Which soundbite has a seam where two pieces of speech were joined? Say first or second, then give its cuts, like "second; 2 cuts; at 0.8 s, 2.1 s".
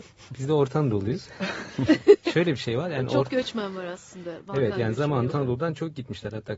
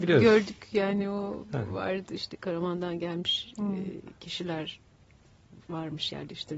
first; 1 cut; at 5.3 s